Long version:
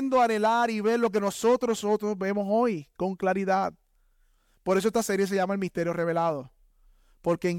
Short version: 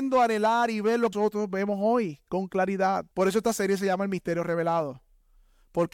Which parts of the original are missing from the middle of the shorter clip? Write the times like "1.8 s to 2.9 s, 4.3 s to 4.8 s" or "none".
1.1 s to 1.8 s, 3.8 s to 4.6 s